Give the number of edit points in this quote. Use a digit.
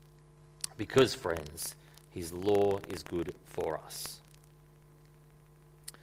0